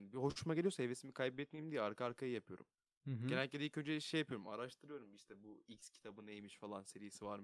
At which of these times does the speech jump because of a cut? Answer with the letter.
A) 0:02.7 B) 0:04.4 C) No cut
C